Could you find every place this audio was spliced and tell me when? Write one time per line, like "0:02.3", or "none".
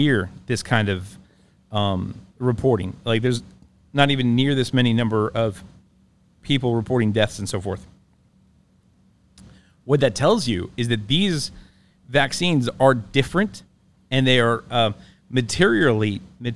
none